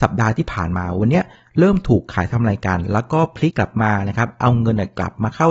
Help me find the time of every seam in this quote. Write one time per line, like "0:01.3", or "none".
0:03.5